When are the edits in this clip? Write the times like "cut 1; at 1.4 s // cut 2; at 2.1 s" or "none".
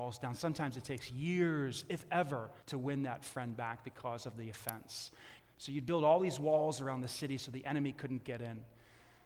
cut 1; at 2.6 s // cut 2; at 5.4 s